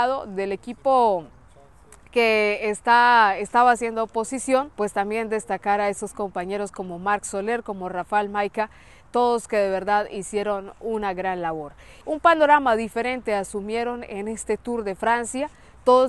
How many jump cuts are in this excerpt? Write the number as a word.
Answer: two